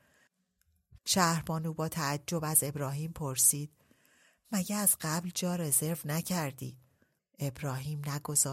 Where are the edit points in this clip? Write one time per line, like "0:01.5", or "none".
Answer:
0:01.0
0:07.2